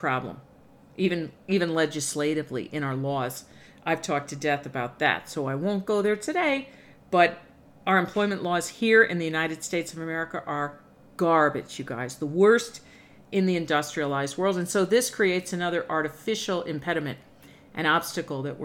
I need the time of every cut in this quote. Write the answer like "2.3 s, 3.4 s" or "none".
none

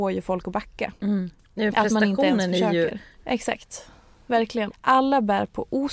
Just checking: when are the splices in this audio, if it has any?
3.1 s, 4.7 s

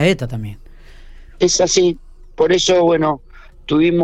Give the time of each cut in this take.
none

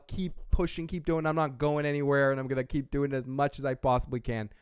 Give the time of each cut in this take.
none

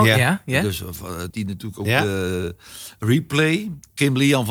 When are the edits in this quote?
1.3 s

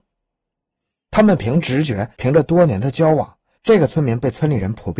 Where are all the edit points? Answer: none

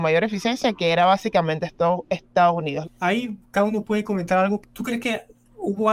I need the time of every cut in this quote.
2.8 s, 4.6 s

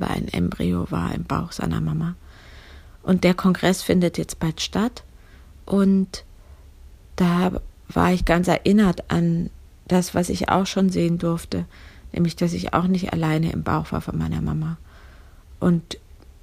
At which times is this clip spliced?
none

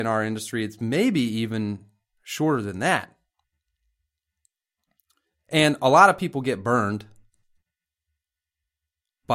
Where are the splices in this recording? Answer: none

